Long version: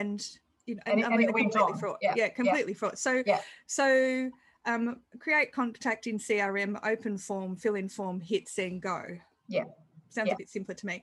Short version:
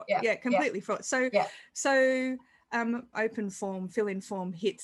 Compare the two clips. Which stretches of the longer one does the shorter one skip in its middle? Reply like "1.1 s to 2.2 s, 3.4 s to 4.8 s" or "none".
5.1 s to 6.8 s

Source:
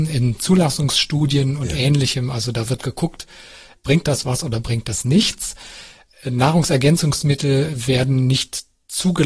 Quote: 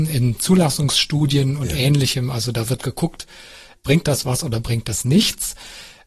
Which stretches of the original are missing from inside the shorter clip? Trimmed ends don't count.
none

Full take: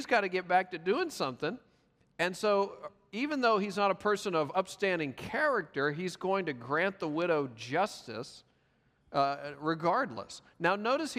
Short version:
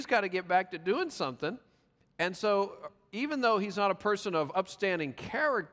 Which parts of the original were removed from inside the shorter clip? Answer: none

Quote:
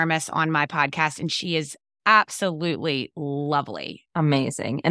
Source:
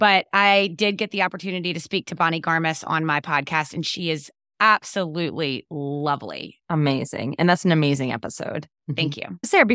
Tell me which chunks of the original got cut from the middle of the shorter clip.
none

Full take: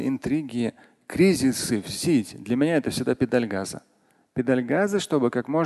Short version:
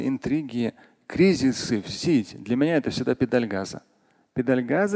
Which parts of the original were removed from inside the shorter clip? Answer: none

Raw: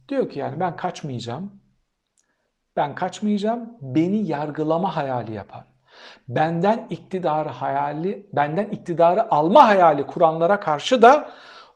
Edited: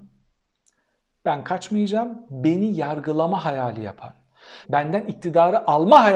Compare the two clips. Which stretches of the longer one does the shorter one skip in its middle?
6.1 s to 8.3 s

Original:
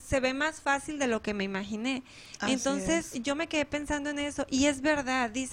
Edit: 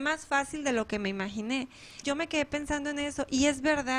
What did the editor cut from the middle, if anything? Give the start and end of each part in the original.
2.4 s to 3.2 s

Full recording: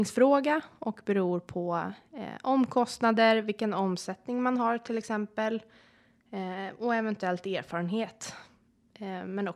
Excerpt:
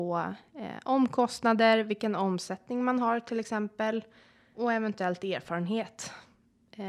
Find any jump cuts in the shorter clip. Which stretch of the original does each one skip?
6.1 s to 6.8 s

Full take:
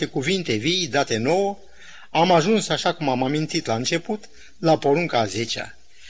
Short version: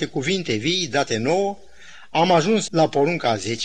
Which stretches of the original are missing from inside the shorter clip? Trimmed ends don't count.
2.7 s to 4.6 s

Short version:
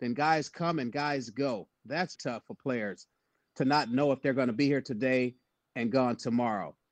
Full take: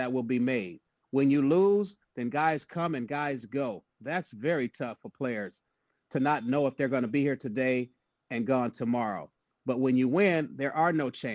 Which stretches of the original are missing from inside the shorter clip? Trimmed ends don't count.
4.3 s to 4.7 s

